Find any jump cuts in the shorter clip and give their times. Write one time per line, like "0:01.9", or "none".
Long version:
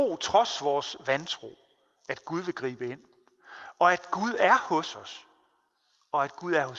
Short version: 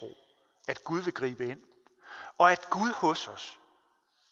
0:02.9